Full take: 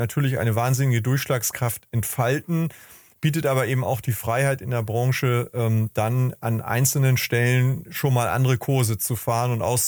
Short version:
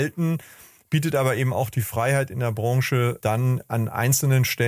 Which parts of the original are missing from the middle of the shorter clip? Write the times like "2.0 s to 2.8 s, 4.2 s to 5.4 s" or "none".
5.5 s to 5.9 s